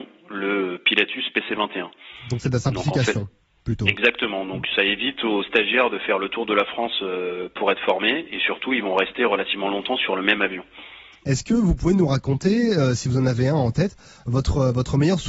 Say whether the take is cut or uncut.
uncut